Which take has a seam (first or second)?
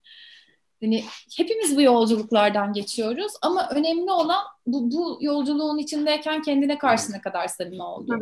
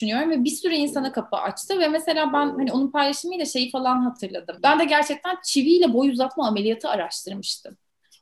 second